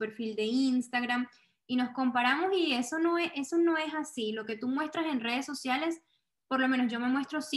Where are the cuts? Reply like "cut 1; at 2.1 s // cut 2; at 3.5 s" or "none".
none